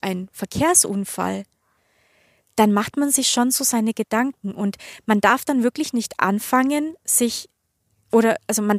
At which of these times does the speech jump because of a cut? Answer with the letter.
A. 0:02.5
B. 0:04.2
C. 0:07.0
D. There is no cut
D